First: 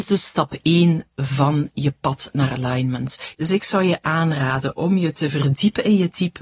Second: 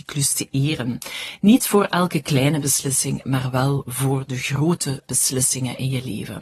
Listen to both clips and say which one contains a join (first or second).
first